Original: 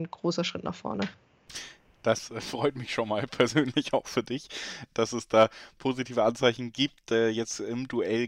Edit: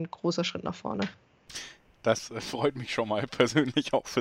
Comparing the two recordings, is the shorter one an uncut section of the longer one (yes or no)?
yes